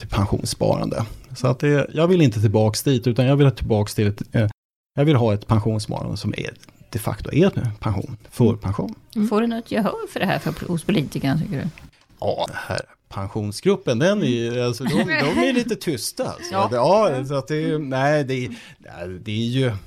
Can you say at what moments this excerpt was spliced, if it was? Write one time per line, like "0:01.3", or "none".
0:12.5